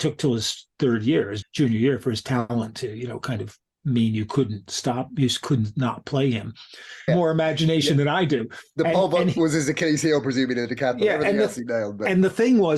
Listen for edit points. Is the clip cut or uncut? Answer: cut